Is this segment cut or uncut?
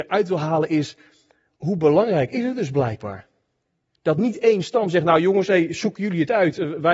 uncut